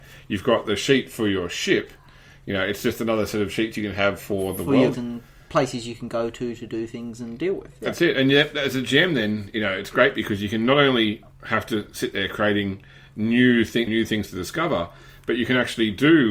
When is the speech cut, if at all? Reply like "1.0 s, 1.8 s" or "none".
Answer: 4.9 s, 13.9 s